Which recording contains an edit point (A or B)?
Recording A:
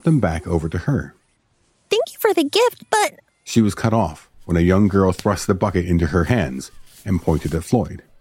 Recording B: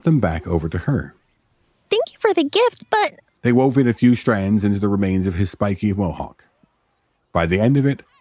B